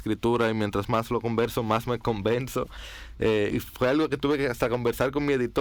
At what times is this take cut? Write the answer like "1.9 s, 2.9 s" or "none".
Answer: 3.5 s